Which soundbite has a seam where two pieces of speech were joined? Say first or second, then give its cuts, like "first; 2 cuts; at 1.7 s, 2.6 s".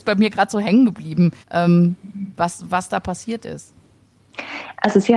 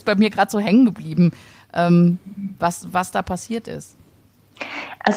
first; 1 cut; at 1.4 s